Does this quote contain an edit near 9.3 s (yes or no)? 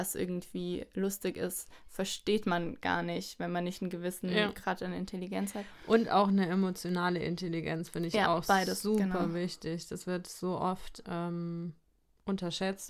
no